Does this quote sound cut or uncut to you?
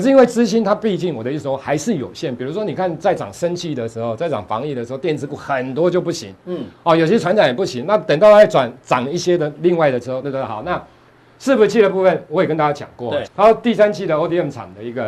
cut